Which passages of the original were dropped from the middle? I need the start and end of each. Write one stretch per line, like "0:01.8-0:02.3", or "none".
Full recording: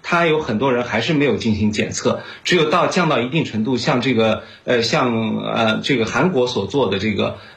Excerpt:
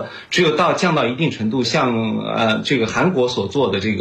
0:03.8-0:04.8